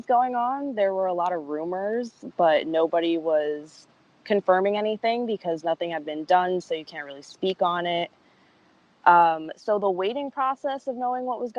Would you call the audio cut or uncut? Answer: uncut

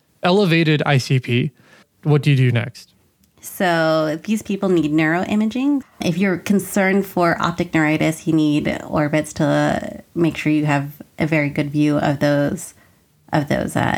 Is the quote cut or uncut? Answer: cut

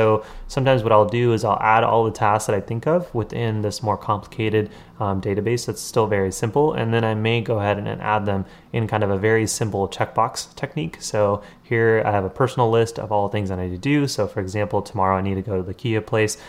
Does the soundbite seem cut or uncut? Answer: uncut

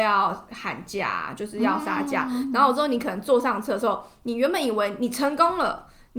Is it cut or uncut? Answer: uncut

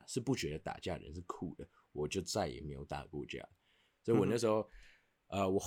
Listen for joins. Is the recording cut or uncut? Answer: uncut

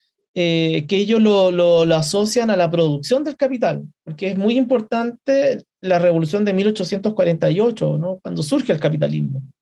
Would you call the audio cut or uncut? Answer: uncut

